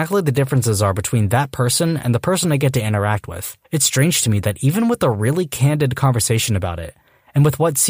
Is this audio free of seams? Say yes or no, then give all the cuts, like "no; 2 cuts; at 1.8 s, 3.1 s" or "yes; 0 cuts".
no; 1 cut; at 3.6 s